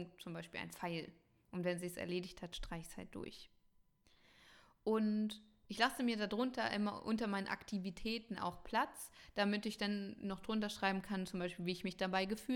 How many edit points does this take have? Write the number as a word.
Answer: zero